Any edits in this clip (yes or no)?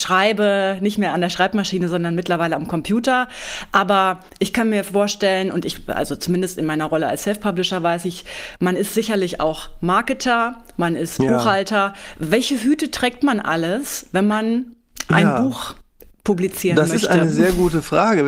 no